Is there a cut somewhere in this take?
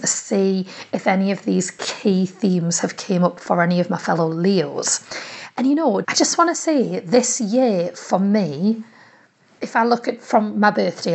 yes; 1 cut; at 6.0 s

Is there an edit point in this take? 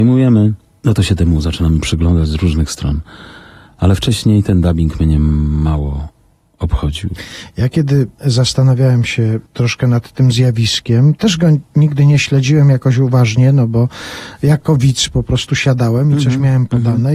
no; 0 cuts

